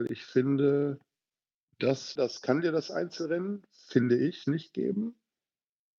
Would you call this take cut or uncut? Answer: cut